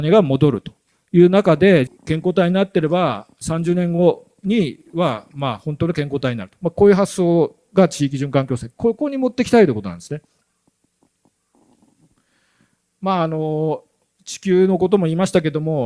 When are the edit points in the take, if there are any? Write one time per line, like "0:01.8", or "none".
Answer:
0:01.9